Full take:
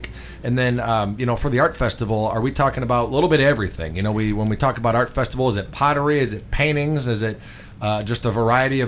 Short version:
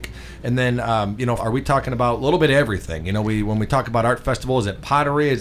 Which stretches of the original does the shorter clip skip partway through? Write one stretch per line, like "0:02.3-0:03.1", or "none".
0:01.4-0:02.3

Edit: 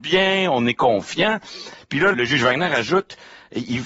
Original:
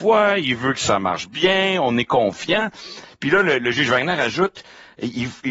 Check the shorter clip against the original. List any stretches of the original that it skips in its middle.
0:03.4-0:03.6

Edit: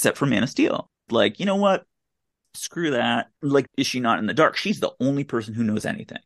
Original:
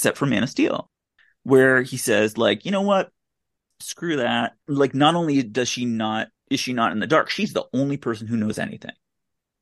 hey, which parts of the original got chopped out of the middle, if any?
0:01.1-0:02.3
0:04.9-0:06.4

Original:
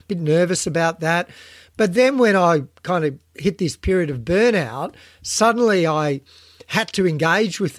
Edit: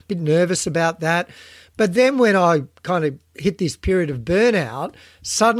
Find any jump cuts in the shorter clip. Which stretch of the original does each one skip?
none

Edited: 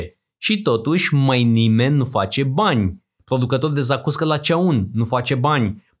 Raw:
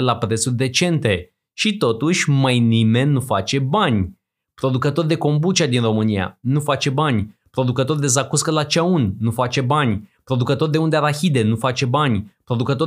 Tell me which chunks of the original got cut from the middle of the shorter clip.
0:04.3-0:07.4

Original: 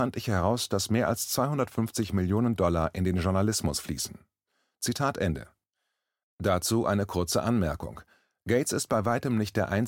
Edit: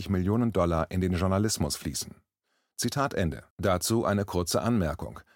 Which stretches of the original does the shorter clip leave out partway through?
0:05.5-0:06.3

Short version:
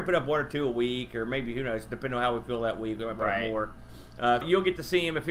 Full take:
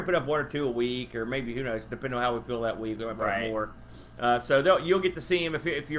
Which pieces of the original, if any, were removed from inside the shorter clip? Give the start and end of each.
0:04.4-0:04.8

